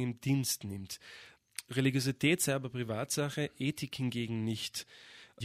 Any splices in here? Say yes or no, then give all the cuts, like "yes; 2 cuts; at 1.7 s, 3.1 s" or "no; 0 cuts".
no; 0 cuts